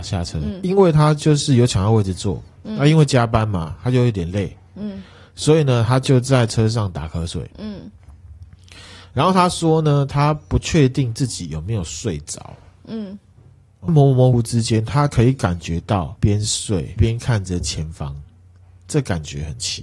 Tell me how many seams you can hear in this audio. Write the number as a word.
one